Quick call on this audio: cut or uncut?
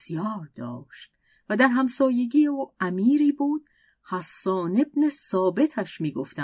uncut